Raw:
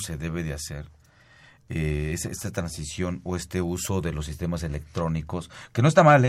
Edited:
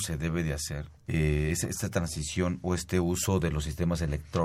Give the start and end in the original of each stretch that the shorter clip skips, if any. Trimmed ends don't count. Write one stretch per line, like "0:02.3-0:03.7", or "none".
0:01.0-0:01.6